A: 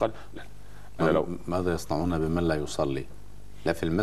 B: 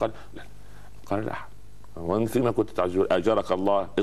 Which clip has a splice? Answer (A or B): B